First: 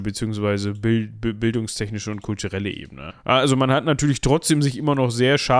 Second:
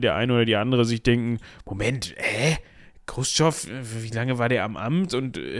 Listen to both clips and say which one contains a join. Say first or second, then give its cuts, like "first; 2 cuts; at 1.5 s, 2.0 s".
first; 1 cut; at 3.1 s